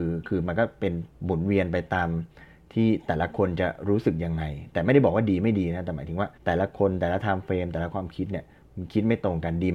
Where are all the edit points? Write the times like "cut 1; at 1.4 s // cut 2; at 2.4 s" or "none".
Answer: cut 1; at 1.1 s // cut 2; at 6.4 s